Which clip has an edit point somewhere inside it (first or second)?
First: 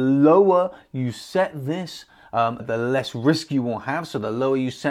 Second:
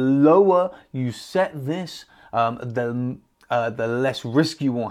first